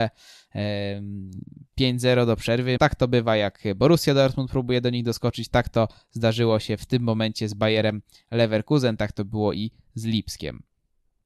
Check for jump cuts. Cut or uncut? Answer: cut